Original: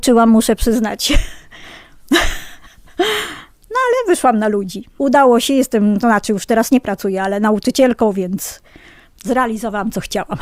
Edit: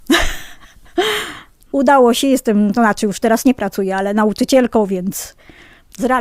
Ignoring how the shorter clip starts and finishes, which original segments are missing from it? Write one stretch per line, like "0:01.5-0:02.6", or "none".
0:03.7-0:04.9